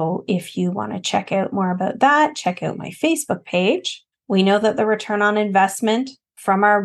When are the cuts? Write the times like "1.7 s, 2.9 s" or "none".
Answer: 4.1 s